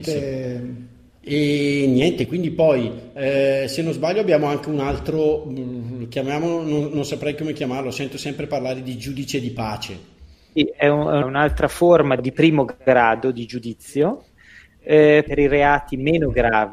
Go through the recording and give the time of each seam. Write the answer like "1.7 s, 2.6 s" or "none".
10.6 s